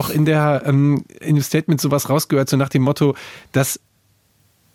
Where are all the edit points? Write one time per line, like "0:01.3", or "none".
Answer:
none